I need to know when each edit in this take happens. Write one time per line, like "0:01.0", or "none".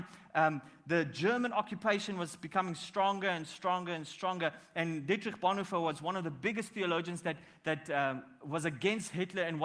none